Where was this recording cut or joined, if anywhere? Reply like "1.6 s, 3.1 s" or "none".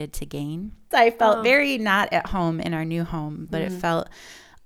0.9 s, 3.5 s